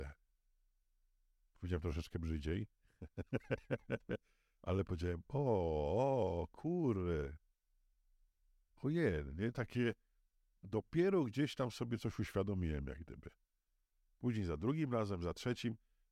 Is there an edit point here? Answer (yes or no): no